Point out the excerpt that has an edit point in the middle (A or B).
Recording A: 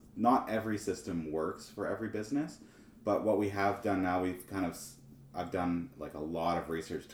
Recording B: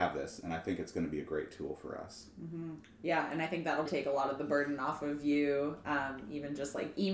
B